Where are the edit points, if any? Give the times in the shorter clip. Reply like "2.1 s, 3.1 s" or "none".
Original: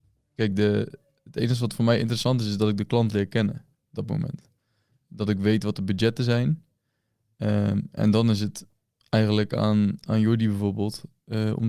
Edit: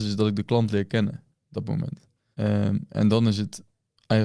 2.3 s

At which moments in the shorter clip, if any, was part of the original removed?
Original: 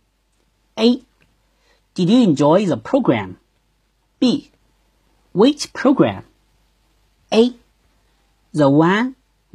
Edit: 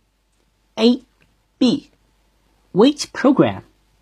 1.4 s

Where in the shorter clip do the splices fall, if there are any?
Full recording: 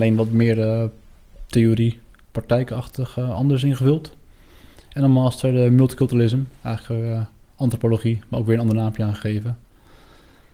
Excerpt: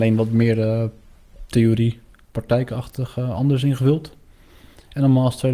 none

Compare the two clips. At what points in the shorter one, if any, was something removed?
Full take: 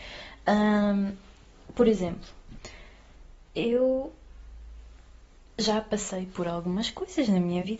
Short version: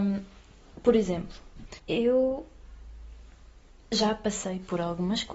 1.8 s

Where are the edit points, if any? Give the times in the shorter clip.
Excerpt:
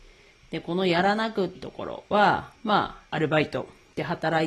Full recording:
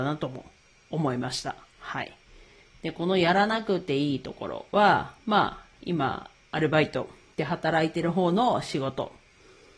1.5 s, 3.1 s

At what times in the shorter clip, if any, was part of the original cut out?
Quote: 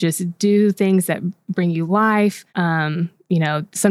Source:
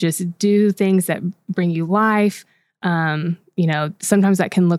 2.5 s

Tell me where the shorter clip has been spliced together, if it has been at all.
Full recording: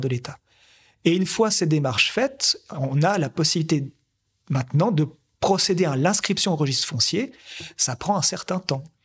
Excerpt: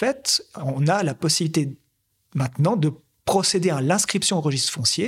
none

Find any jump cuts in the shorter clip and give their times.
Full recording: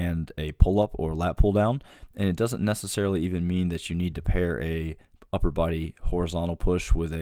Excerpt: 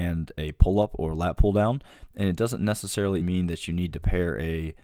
3.2 s

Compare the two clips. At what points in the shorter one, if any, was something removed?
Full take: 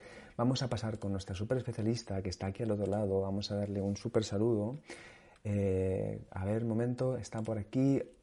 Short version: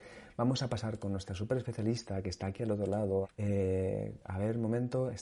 3.2 s

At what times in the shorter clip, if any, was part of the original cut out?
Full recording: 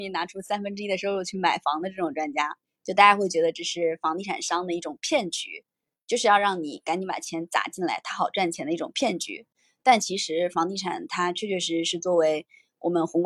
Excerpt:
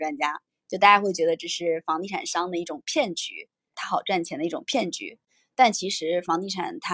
3.7 s

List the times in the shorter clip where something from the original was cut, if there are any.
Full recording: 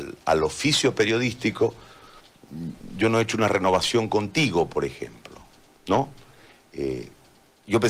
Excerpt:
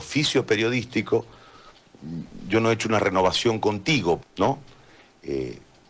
4.2 s

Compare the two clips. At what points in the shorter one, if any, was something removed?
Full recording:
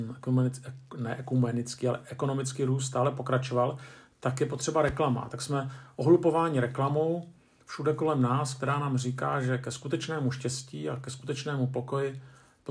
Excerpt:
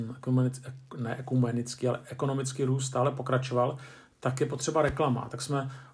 none

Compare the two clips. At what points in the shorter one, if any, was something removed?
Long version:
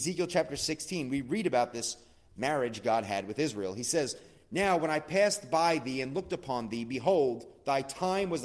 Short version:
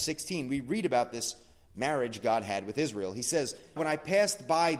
3.8 s

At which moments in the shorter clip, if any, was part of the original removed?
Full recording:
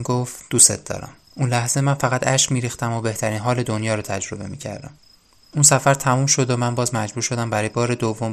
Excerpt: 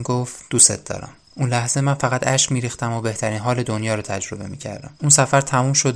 5.0 s

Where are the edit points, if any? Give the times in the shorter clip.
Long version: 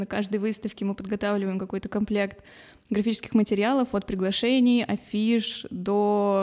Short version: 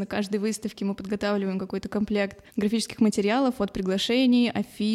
2.5 s

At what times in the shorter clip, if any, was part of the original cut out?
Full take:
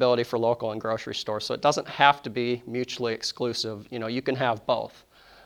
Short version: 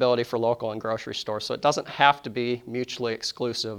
none

